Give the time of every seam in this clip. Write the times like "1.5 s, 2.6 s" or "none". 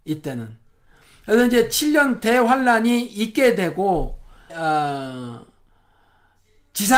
4.5 s

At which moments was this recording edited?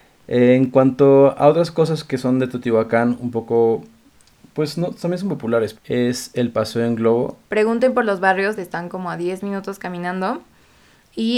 5.8 s, 7.5 s, 8.6 s

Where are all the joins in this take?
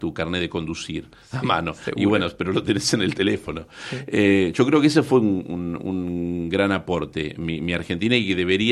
none

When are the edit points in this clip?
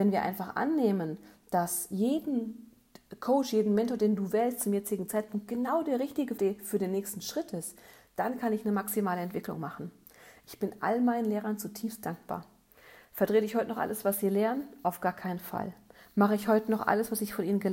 6.4 s

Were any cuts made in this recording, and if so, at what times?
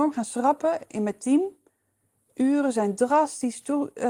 none

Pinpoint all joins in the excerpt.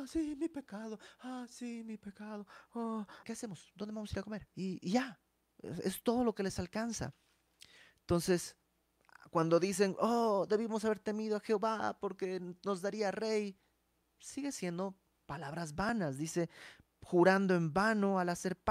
3.2 s

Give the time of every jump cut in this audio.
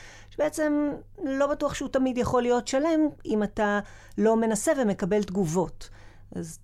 none

